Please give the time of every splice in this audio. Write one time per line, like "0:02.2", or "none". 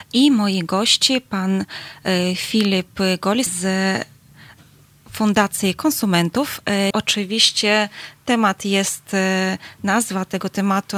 0:03.5
0:06.9